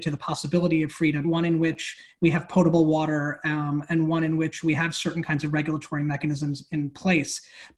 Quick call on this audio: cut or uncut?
cut